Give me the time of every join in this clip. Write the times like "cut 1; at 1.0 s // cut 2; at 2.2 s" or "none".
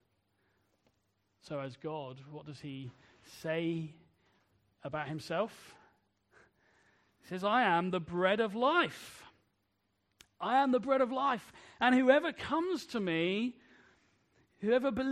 none